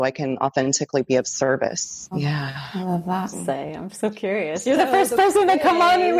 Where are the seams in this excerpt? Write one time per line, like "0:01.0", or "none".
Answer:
0:02.1
0:03.3